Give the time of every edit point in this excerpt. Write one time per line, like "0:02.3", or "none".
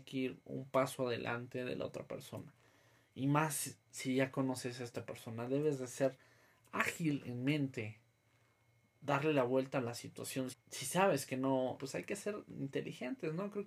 0:10.5
0:11.8